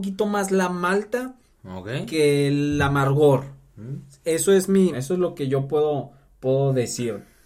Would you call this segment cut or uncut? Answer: cut